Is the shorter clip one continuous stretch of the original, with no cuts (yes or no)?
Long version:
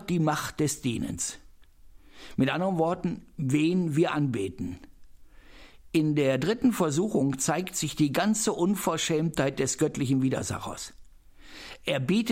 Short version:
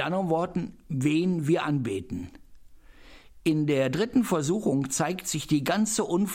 yes